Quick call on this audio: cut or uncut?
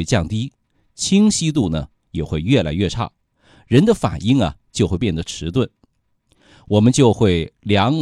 uncut